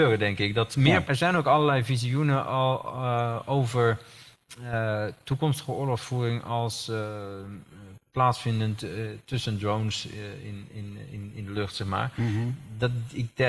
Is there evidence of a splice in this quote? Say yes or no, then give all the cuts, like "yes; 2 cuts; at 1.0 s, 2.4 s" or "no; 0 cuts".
yes; 1 cut; at 1.0 s